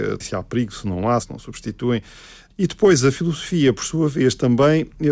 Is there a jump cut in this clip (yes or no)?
yes